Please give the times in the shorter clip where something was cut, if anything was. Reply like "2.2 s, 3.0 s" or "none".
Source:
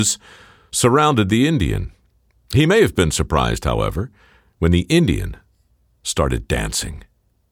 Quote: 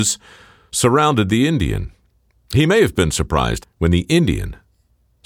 3.6 s